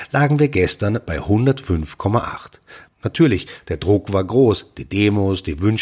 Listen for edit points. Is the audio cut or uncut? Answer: cut